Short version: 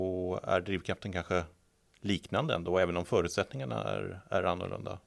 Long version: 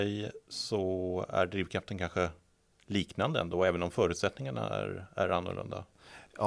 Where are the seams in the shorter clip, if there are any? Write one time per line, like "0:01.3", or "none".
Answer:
none